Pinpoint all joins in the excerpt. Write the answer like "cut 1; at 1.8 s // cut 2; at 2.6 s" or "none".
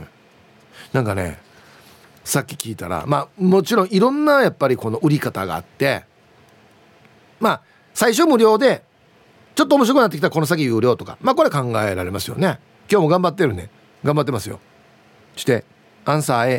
cut 1; at 12.8 s